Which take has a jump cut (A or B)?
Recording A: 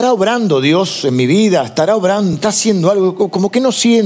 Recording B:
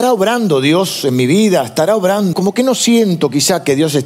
B